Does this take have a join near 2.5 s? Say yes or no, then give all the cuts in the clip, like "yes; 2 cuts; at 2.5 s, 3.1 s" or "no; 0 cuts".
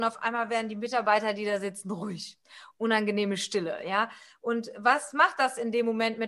no; 0 cuts